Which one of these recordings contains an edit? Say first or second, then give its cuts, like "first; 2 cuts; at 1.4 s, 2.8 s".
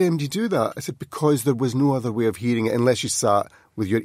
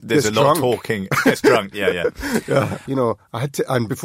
second; 1 cut; at 2.9 s